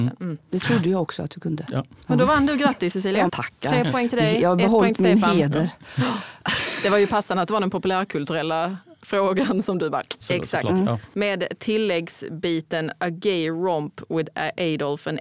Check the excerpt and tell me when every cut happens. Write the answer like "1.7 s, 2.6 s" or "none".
3.3 s, 10.2 s